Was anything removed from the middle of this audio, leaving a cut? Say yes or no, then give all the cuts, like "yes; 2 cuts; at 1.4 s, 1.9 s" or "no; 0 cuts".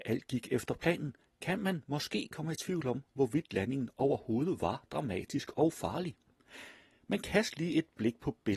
no; 0 cuts